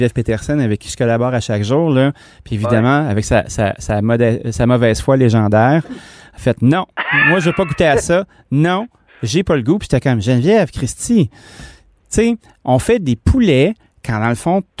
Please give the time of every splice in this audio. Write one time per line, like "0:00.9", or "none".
none